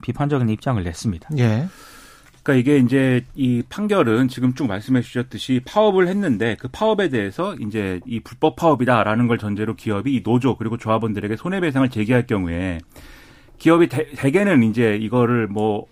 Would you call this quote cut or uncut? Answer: uncut